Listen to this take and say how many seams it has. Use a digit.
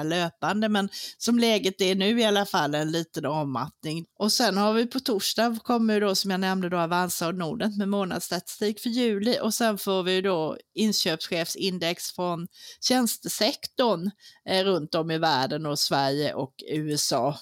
1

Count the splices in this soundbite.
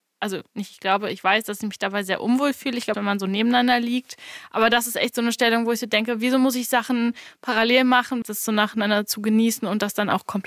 2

